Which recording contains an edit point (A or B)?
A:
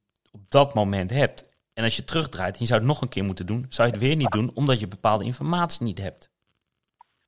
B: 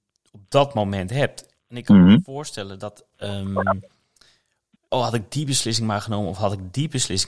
B